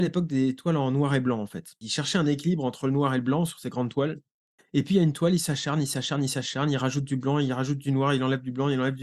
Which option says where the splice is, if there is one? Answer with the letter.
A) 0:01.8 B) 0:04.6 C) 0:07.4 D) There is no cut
D